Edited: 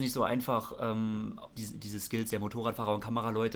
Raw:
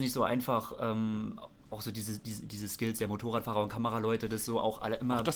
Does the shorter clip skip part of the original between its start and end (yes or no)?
yes